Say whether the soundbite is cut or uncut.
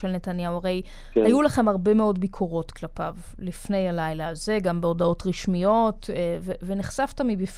uncut